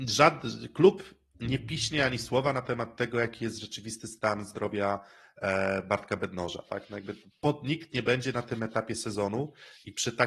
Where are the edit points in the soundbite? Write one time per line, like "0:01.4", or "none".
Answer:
none

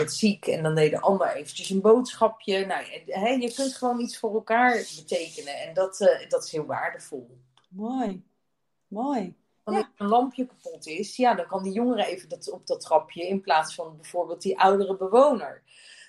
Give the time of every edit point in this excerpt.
0:09.6

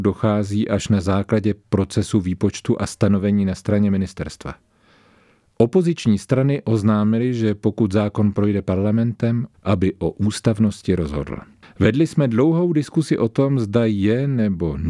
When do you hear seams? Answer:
0:09.5
0:11.6

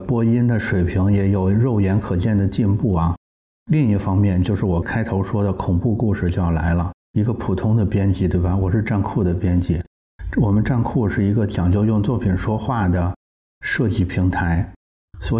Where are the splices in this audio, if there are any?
0:07.1

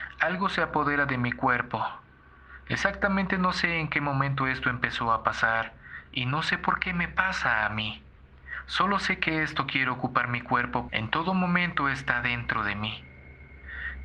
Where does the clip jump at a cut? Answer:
0:10.9

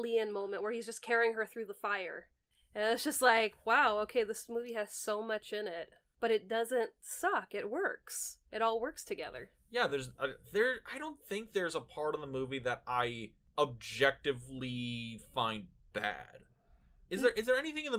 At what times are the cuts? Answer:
none

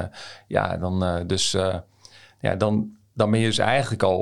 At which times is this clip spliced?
none

